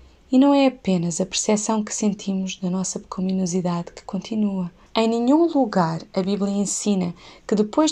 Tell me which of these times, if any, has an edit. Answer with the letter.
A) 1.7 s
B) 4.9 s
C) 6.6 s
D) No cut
B